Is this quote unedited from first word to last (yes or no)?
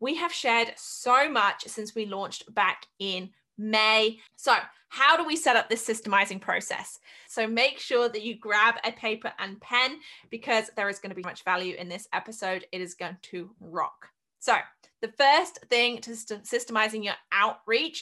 no